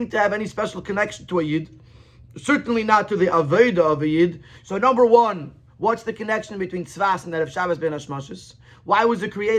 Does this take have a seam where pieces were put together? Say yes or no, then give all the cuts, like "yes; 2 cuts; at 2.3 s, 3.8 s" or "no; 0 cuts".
yes; 1 cut; at 4.6 s